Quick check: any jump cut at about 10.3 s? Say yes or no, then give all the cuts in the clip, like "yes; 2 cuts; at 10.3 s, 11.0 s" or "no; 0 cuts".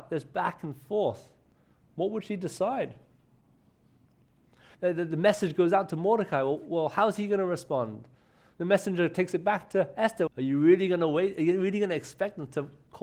yes; 2 cuts; at 4.7 s, 10.3 s